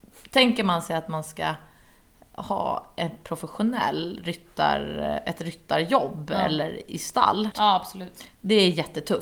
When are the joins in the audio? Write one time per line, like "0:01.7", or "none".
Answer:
0:07.5